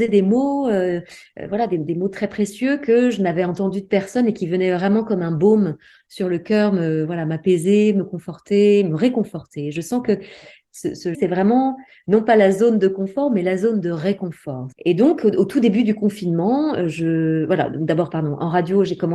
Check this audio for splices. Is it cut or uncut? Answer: cut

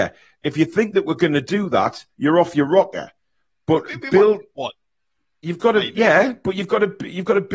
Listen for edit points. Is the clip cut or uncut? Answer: uncut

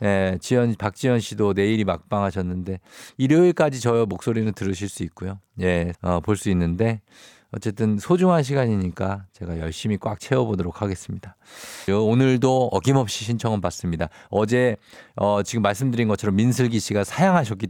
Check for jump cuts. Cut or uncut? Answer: cut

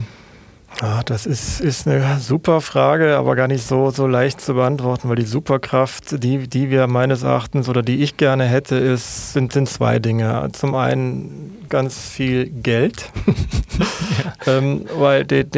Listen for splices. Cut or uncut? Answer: cut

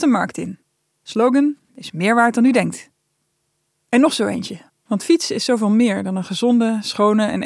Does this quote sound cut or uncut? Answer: cut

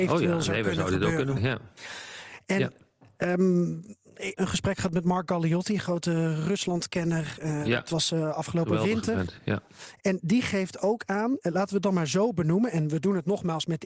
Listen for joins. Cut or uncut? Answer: cut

